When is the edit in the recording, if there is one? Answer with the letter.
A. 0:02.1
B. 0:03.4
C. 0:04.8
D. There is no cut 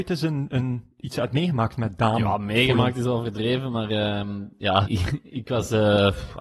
C